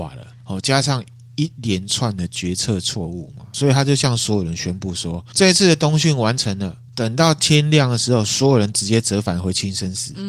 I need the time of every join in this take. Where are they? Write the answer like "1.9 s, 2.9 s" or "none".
6.9 s